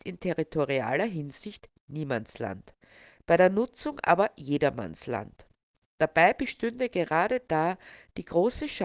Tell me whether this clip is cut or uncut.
uncut